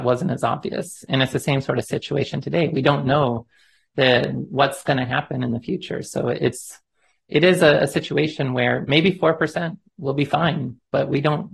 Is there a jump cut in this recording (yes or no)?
no